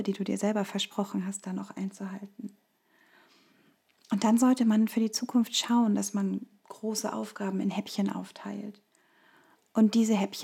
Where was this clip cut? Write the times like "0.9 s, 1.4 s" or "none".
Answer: none